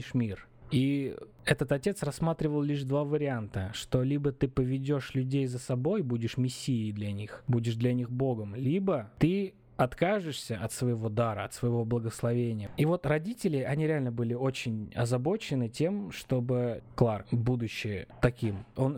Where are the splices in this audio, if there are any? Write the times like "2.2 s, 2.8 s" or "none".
none